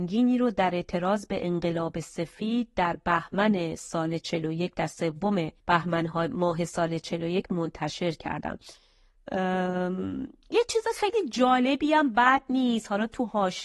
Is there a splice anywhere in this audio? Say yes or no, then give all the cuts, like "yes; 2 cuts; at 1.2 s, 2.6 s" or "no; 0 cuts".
yes; 1 cut; at 5.6 s